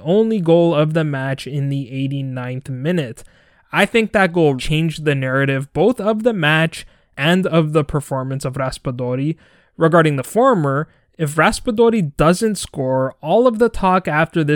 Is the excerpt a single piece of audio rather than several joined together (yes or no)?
no